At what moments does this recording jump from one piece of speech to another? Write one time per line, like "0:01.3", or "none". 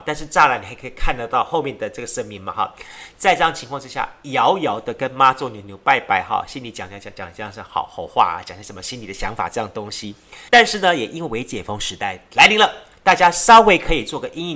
0:10.5